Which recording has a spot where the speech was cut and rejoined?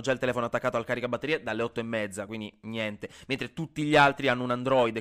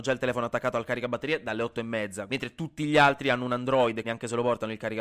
second; 2 cuts; at 2.3 s, 4.0 s

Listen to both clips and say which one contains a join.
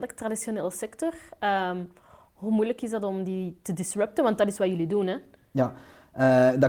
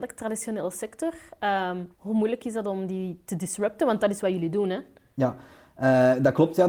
second; 1 cut; at 1.9 s

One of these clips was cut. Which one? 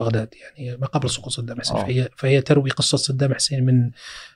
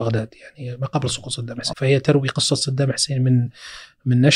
second; 1 cut; at 1.7 s

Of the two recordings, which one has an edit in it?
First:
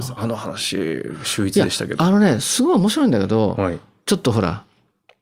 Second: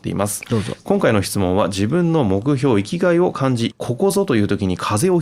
second; 1 cut; at 3.7 s

